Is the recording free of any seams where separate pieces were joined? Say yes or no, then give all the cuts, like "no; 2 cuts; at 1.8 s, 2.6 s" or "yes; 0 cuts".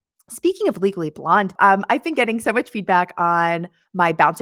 no; 1 cut; at 1.6 s